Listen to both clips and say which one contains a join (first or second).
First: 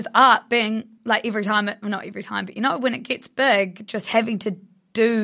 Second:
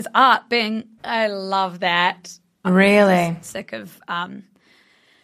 second